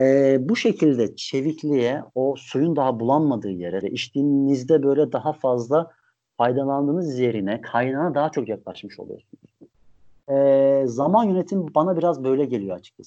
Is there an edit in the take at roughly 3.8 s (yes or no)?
yes